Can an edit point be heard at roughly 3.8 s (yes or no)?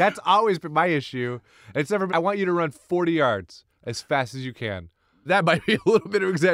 no